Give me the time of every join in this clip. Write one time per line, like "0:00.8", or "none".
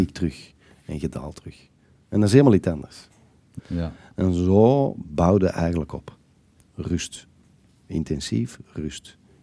0:03.6